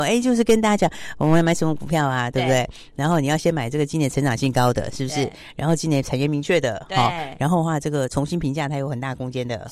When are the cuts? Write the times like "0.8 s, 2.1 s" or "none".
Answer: none